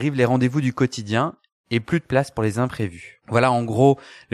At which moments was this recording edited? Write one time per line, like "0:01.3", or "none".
0:03.2